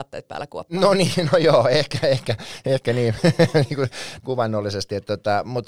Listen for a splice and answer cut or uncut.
cut